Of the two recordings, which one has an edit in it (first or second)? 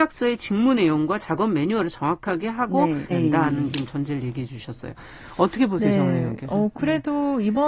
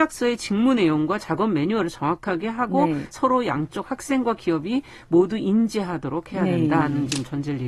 first